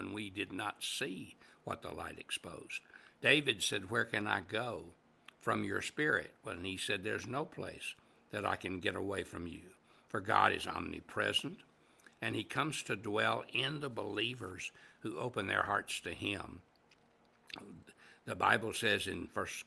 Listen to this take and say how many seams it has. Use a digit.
1